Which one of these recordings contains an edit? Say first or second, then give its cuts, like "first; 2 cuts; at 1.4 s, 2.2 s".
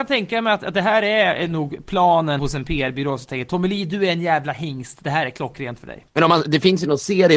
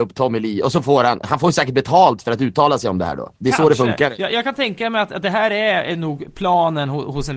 first; 1 cut; at 2.4 s